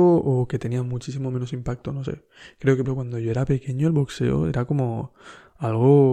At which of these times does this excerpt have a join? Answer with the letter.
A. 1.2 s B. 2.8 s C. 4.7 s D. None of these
B